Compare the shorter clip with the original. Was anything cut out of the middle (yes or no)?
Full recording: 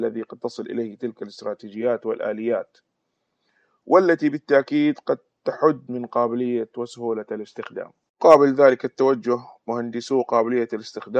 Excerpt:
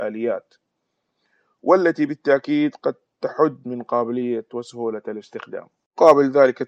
no